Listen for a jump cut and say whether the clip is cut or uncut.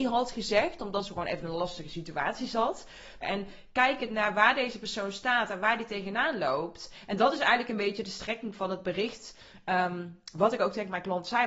cut